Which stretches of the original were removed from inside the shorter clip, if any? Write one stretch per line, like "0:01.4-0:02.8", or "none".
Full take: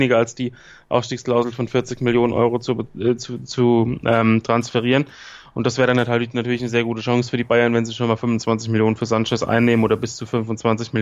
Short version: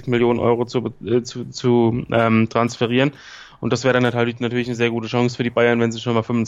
none